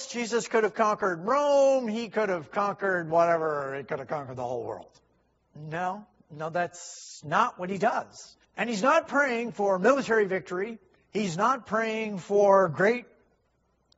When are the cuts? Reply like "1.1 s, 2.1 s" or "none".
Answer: 5.4 s, 8.4 s